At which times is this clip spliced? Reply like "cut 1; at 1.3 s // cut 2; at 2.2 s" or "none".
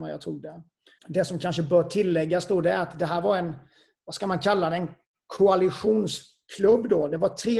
cut 1; at 1.0 s

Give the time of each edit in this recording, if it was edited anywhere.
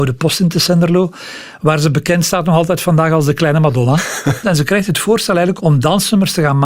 cut 1; at 4.4 s // cut 2; at 5.6 s

